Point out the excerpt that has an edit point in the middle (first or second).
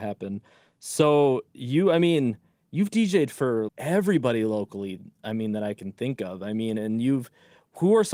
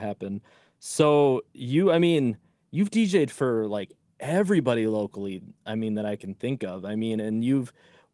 first